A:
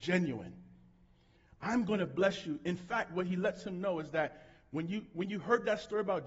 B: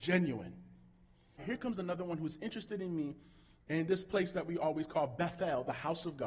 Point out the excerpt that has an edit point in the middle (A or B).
B